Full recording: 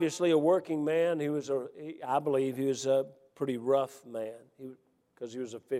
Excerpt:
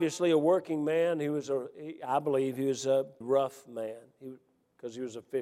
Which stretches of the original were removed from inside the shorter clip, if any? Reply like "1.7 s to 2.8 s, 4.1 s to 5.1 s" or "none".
3.2 s to 3.6 s